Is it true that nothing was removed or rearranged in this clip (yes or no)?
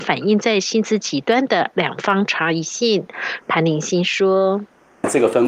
no